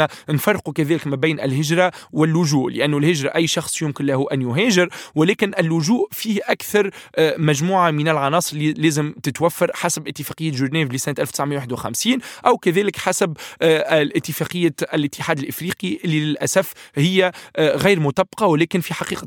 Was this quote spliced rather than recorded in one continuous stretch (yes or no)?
no